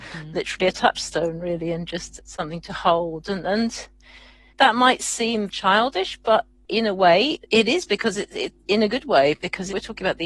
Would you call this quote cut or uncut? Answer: uncut